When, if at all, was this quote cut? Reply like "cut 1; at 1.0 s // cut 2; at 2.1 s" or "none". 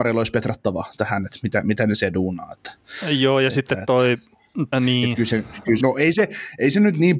cut 1; at 4.7 s // cut 2; at 5.8 s